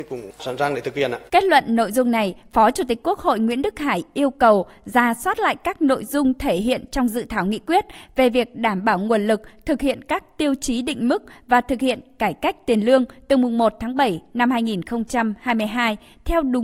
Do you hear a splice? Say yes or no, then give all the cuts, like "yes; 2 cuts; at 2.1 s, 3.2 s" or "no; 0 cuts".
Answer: yes; 1 cut; at 1.3 s